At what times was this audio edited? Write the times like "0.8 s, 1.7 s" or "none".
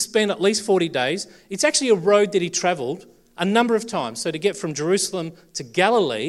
none